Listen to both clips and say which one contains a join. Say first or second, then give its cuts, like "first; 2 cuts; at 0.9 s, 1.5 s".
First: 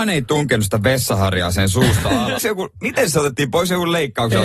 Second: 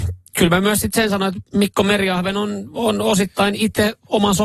first; 1 cut; at 2.4 s